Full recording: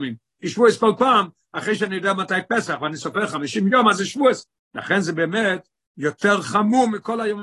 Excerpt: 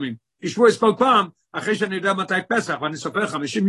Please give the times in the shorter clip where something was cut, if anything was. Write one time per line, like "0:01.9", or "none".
none